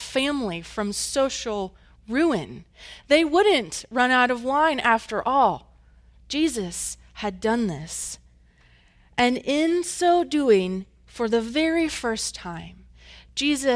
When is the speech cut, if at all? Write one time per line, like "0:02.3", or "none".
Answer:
none

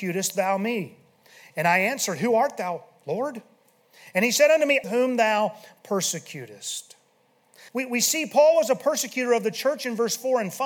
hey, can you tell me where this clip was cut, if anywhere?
0:04.8
0:07.7

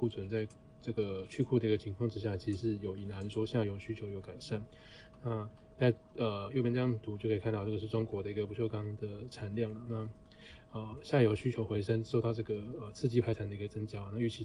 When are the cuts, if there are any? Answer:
none

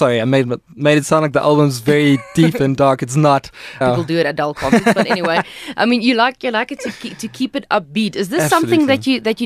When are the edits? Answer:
0:03.8

